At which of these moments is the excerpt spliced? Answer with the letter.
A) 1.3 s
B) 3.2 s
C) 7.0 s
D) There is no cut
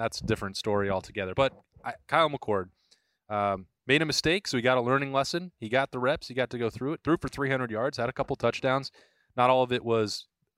D